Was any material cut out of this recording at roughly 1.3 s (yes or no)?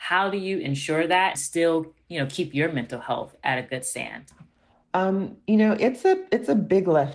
yes